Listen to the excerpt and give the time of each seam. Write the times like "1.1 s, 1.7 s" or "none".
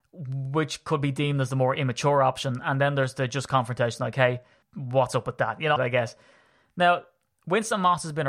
4.6 s, 5.8 s